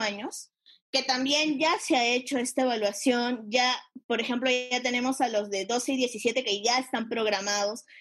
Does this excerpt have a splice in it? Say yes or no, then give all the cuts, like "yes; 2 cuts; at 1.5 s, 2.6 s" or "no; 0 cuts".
no; 0 cuts